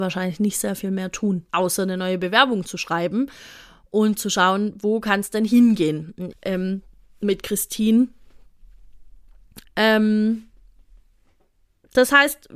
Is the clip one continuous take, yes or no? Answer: no